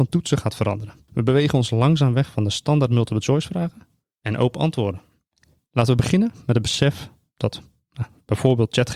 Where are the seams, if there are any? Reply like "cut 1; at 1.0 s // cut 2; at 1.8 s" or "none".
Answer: cut 1; at 1.1 s // cut 2; at 5.6 s